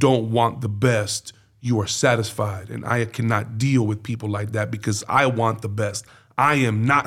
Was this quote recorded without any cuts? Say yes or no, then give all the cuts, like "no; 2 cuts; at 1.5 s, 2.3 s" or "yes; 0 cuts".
yes; 0 cuts